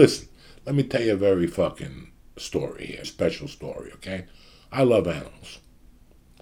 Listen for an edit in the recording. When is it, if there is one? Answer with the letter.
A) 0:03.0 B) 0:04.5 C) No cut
A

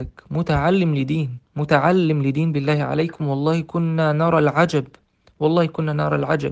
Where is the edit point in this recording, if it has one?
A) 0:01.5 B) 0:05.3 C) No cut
A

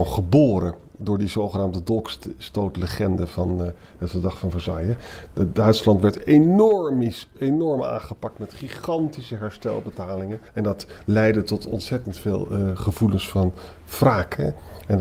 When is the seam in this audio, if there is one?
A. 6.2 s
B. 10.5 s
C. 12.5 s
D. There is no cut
B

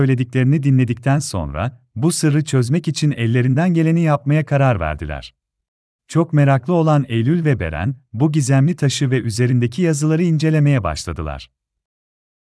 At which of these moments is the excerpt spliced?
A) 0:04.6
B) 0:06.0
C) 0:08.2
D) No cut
B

